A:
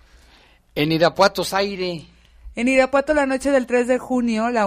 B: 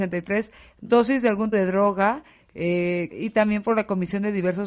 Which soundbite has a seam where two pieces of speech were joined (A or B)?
B